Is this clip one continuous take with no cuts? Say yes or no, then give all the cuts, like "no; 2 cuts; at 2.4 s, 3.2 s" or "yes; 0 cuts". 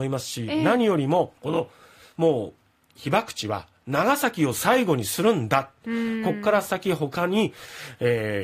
no; 1 cut; at 1.4 s